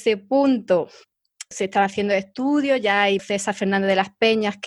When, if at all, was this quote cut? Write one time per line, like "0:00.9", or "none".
0:01.5
0:03.2